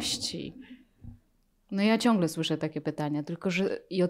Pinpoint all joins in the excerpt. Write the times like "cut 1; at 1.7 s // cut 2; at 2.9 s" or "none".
none